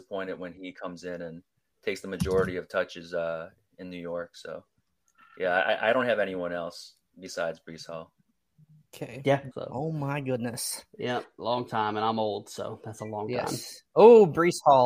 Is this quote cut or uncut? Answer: cut